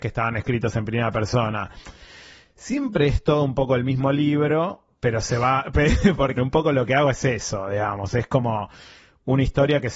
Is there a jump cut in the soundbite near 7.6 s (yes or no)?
no